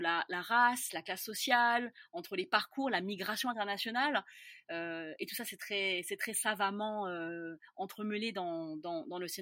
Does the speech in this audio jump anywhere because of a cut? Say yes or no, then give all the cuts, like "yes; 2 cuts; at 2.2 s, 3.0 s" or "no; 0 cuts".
no; 0 cuts